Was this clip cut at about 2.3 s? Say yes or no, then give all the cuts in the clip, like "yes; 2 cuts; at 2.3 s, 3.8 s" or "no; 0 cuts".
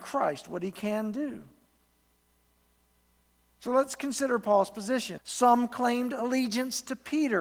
no; 1 cut; at 5.2 s